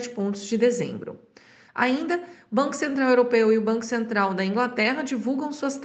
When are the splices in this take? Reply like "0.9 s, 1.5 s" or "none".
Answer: 1.7 s